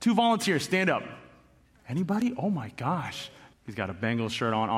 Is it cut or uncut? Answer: cut